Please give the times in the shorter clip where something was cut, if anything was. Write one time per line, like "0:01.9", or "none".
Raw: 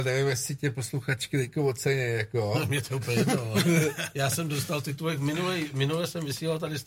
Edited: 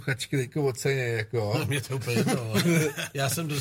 none

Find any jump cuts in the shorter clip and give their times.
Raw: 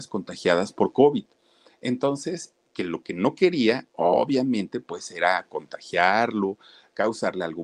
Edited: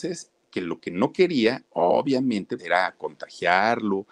0:02.6

